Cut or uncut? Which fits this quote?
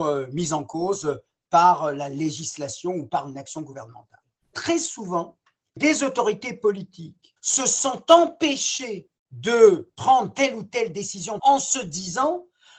cut